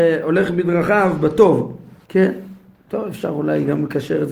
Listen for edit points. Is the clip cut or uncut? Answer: cut